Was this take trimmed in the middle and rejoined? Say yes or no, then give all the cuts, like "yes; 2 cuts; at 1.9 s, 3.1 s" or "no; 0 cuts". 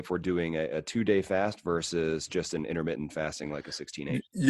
no; 0 cuts